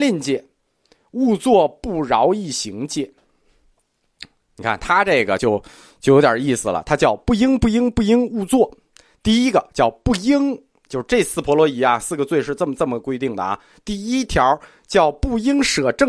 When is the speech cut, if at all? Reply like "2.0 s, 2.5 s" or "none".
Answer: none